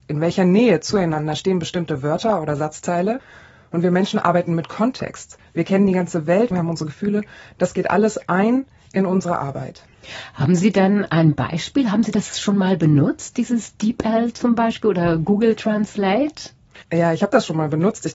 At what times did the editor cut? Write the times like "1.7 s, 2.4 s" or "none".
6.5 s, 16.8 s